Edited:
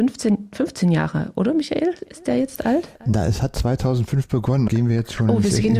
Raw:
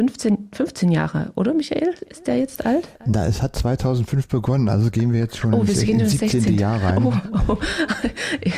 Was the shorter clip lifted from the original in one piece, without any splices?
no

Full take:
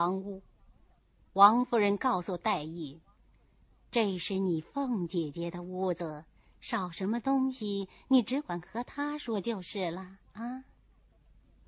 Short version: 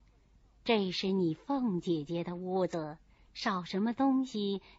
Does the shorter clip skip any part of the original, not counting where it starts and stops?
no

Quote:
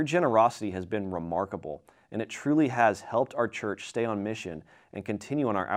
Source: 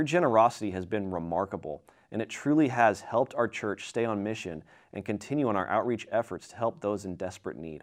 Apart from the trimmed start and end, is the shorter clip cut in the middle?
no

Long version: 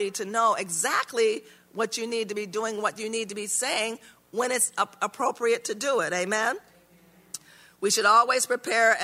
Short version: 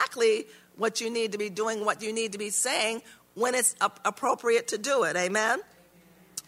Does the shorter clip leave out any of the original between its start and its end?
no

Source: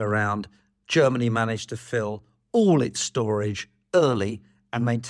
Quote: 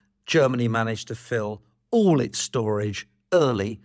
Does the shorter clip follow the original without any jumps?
yes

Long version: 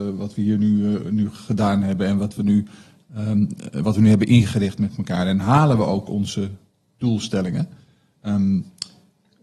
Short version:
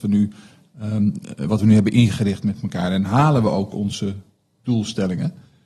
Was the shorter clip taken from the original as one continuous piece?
yes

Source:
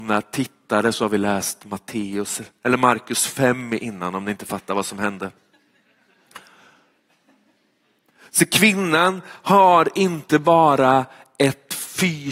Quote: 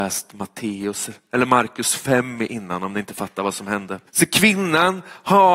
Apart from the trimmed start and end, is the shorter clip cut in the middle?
yes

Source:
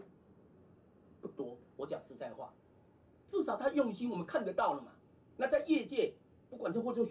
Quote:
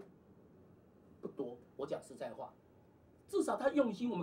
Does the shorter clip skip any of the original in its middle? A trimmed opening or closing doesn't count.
no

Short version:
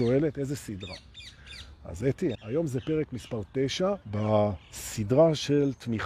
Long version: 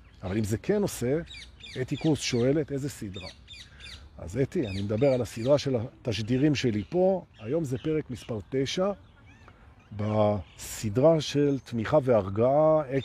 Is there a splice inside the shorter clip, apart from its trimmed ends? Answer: yes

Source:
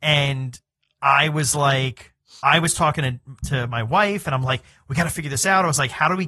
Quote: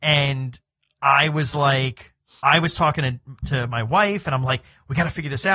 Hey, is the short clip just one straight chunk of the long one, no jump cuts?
yes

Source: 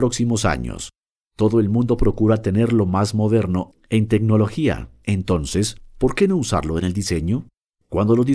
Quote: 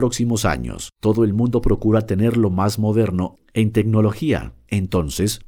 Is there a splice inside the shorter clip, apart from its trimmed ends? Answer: yes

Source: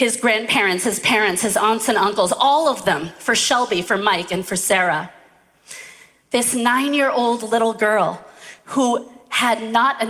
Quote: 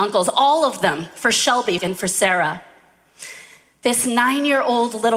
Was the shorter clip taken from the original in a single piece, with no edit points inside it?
no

